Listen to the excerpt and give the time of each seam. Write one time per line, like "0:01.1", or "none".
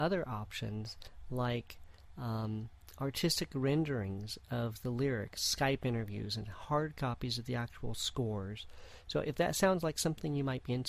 none